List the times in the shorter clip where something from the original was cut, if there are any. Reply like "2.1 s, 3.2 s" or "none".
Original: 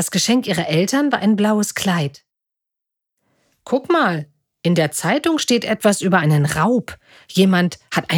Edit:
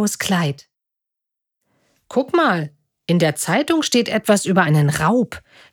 none